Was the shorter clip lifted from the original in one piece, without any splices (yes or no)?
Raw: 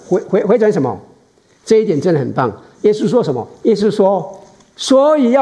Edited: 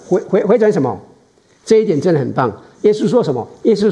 yes